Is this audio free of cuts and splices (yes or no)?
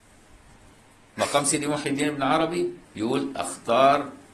no